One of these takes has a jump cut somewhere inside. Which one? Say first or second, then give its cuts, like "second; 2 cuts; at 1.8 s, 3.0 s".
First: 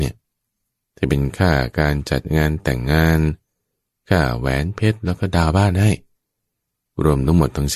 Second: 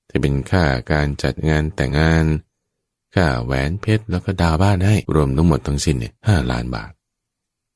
second; 3 cuts; at 1.9 s, 5.1 s, 6.2 s